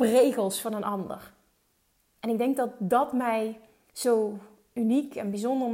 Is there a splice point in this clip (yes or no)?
no